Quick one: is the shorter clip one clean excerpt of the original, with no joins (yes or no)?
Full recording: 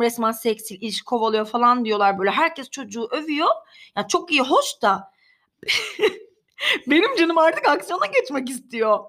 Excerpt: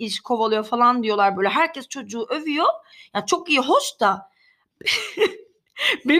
yes